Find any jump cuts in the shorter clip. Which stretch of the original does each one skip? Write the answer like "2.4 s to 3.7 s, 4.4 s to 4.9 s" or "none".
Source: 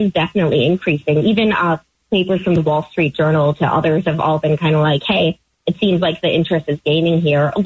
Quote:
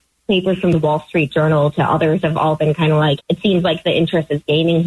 5.0 s to 5.5 s